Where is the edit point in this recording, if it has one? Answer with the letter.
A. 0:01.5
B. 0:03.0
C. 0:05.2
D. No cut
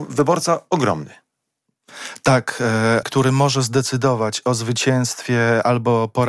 B